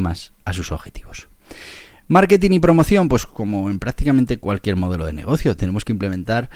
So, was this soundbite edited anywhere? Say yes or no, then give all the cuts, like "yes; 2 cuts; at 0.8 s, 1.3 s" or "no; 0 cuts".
no; 0 cuts